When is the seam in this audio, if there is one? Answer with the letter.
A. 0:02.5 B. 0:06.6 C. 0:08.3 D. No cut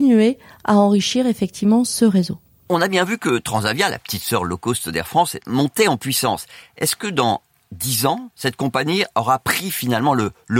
C